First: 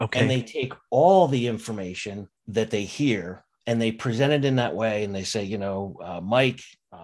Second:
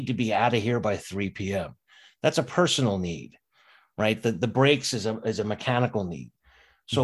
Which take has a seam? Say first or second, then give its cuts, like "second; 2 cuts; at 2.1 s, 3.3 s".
first; 1 cut; at 2.4 s